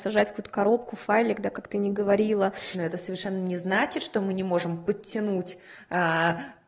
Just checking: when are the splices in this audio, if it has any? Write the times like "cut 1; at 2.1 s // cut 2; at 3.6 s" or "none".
cut 1; at 2.7 s

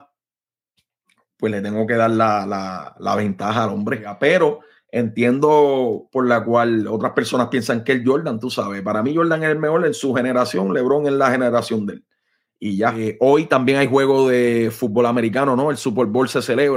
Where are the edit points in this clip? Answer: none

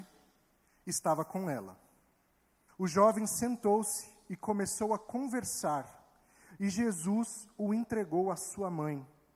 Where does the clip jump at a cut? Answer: cut 1; at 2.7 s

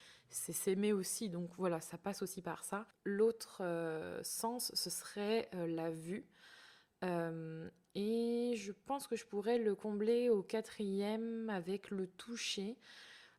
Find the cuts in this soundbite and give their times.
none

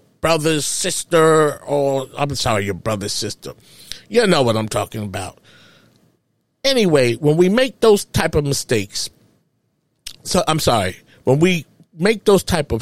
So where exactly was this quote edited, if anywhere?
none

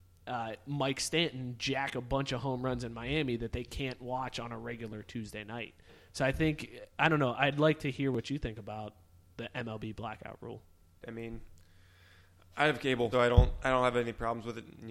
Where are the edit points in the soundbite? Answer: cut 1; at 11.0 s // cut 2; at 13.1 s

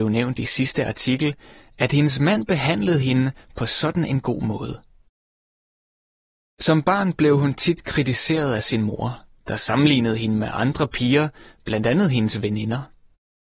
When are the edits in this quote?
none

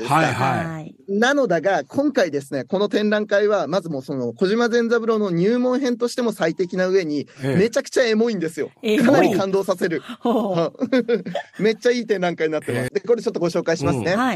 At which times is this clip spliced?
cut 1; at 12.9 s

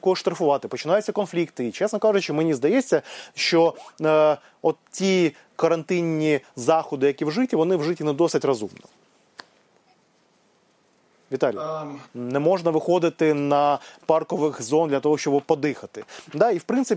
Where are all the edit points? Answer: cut 1; at 12.1 s

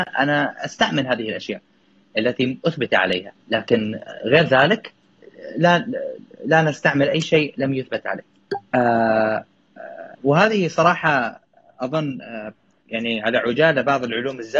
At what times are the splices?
cut 1; at 3.4 s // cut 2; at 8.7 s // cut 3; at 10.1 s

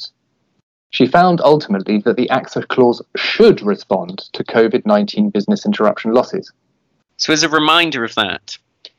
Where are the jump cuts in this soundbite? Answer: cut 1; at 7.1 s

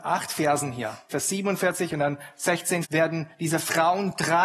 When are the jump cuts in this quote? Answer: cut 1; at 1.1 s // cut 2; at 2.8 s

